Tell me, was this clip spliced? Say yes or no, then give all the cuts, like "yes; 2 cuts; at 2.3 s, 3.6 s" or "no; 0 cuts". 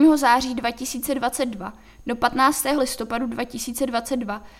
yes; 1 cut; at 2.8 s